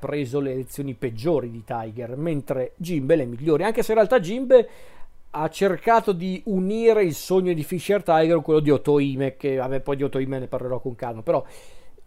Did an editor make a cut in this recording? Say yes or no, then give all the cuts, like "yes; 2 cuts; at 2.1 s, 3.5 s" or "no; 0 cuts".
no; 0 cuts